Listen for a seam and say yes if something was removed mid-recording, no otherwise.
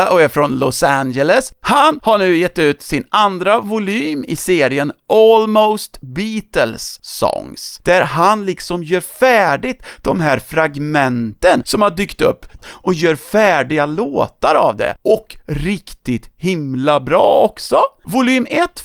yes